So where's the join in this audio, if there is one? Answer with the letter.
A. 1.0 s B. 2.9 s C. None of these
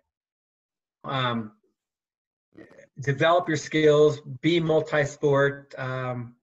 A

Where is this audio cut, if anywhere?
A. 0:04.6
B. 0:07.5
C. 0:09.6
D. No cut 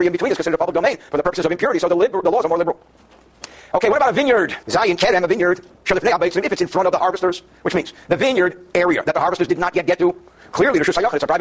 A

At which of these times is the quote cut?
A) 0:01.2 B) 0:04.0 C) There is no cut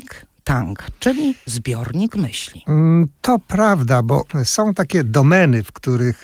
C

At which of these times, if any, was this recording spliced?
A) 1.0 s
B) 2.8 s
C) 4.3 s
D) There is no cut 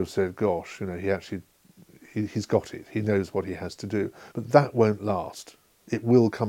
C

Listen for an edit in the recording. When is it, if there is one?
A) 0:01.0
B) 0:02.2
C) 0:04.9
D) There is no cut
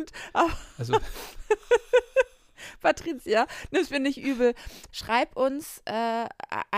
C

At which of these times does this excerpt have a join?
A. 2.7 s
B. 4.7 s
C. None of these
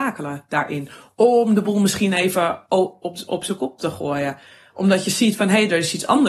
C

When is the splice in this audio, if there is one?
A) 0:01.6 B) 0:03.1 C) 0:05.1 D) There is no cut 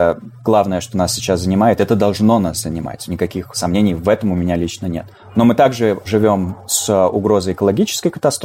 D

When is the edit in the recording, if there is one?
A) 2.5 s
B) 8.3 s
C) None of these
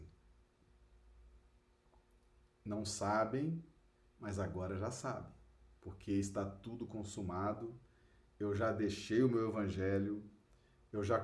C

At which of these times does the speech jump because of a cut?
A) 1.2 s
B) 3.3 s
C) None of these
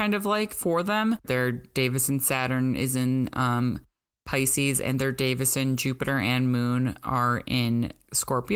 A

